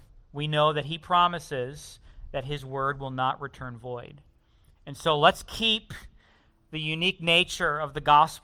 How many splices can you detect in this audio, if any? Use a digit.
0